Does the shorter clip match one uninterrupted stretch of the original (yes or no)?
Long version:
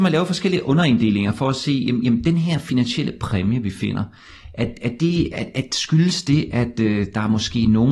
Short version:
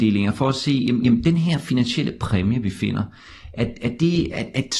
yes